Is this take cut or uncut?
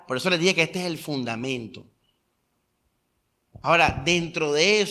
uncut